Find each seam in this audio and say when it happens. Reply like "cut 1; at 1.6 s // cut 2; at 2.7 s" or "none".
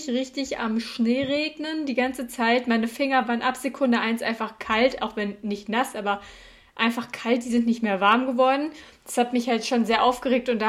none